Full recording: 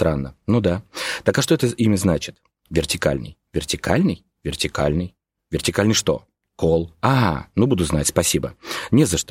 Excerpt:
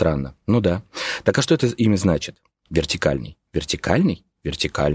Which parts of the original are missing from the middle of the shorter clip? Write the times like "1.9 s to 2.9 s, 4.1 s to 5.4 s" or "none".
none